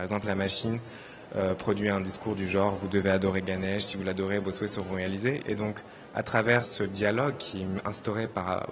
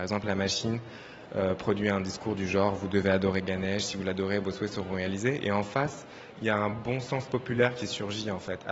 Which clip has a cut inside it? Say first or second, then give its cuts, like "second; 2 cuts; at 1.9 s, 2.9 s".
first; 2 cuts; at 5.4 s, 6.6 s